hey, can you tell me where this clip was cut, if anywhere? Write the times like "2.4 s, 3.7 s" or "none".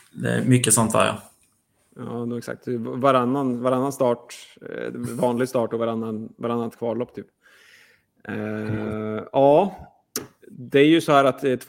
none